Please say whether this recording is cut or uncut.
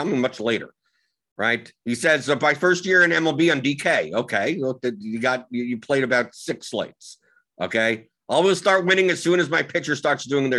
uncut